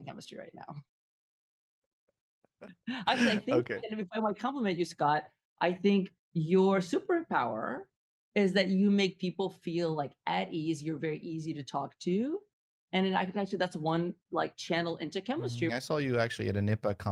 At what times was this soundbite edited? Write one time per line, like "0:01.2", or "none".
0:15.7